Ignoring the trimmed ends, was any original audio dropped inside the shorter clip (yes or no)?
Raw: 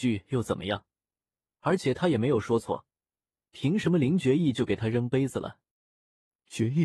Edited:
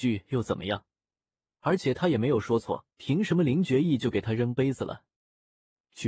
yes